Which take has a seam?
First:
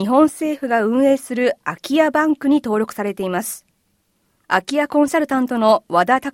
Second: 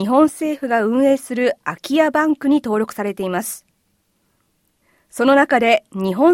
first; 1 cut; at 4.4 s

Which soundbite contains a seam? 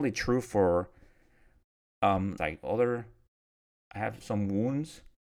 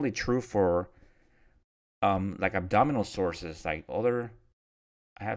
first; 2 cuts; at 2.4 s, 4.2 s

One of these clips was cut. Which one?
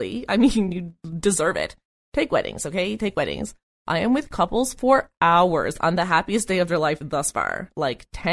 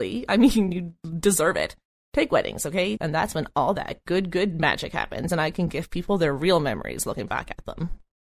second; 1 cut; at 3.0 s

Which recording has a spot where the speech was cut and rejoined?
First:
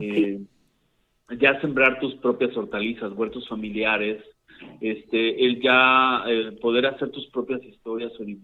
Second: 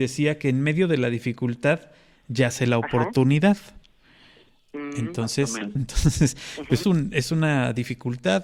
second; 2 cuts; at 5.8 s, 6.8 s

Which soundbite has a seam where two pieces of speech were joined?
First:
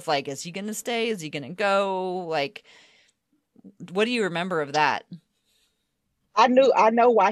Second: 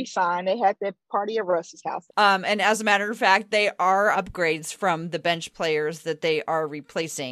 second; 2 cuts; at 2.1 s, 4.1 s

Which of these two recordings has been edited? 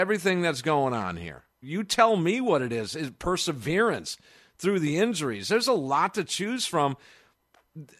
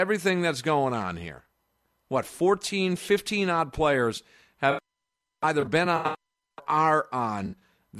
first; 1 cut; at 1.6 s

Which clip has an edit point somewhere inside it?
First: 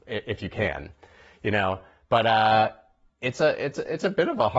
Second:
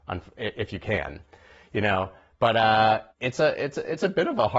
second; 1 cut; at 3.1 s

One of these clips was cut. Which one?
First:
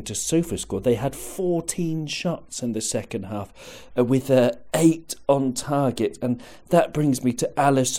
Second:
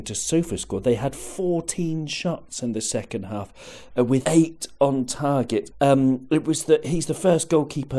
second; 2 cuts; at 4.2 s, 5.7 s

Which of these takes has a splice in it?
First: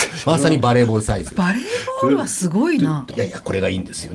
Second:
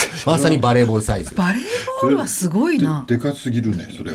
first; 1 cut; at 3.1 s

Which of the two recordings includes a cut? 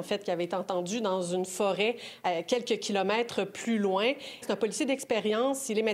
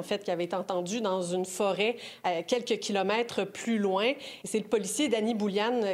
first; 1 cut; at 4.4 s

